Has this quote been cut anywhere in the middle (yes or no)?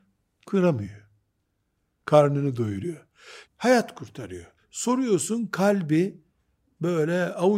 yes